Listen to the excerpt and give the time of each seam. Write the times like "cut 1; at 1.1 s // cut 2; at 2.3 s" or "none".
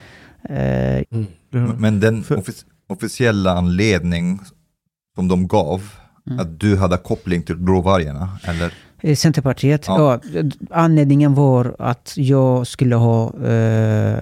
cut 1; at 1.0 s